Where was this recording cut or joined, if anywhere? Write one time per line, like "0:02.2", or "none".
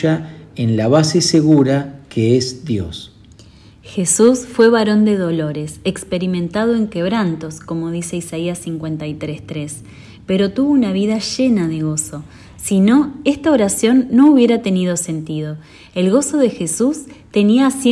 none